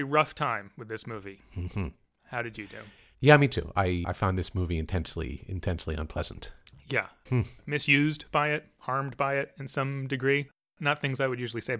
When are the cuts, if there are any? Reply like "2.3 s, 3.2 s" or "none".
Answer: 4.0 s, 7.3 s